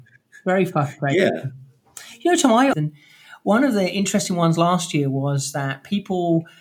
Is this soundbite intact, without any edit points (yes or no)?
no